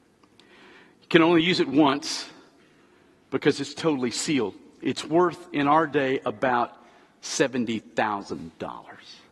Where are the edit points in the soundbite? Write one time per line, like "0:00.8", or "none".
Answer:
none